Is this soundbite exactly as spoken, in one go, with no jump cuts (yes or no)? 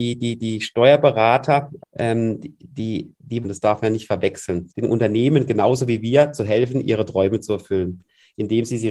no